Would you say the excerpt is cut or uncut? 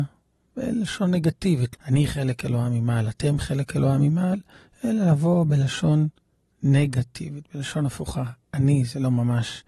cut